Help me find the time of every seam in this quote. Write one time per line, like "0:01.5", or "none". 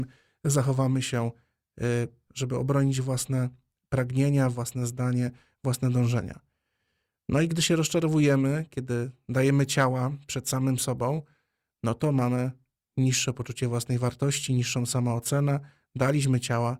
0:02.3